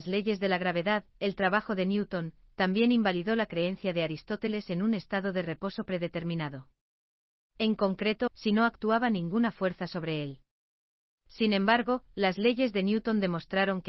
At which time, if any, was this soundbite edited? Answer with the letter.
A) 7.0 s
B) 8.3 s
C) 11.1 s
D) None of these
B